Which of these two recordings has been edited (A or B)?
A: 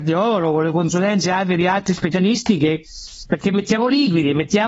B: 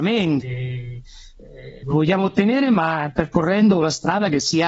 B